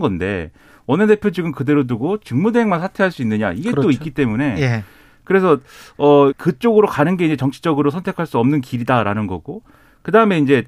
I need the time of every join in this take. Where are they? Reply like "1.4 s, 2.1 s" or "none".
6.3 s